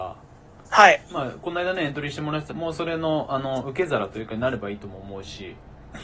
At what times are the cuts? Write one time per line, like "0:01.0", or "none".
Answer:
0:02.5

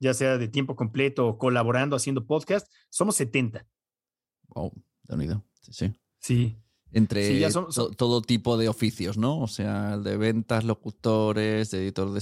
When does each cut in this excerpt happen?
none

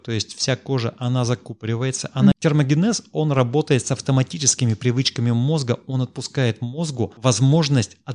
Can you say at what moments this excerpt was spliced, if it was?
0:02.3

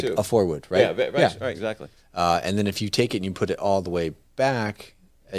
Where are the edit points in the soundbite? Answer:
0:02.0

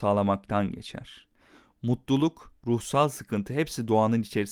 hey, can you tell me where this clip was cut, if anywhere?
none

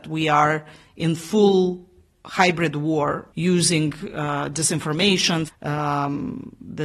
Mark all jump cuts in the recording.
0:03.3
0:05.5

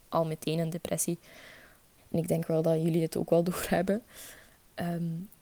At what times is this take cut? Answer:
0:02.0

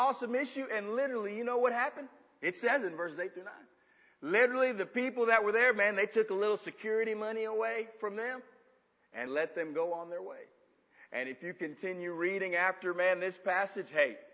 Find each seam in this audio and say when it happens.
0:09.3

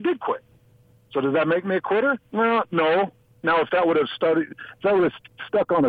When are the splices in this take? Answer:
none

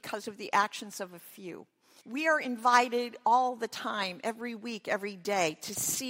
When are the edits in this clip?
0:02.0

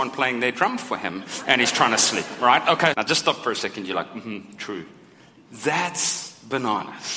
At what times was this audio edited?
0:02.9

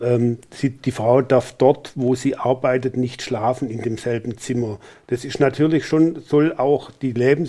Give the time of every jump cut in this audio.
none

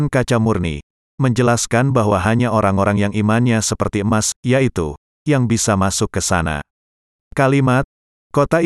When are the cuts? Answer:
0:05.1
0:07.1

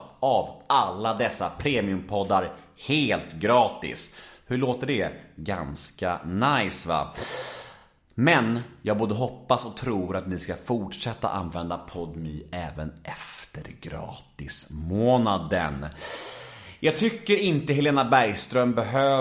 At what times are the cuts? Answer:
none

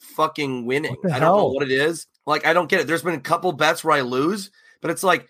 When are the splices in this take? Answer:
0:02.1

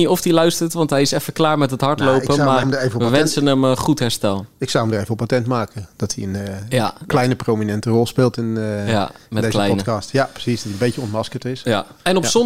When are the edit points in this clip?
0:02.6

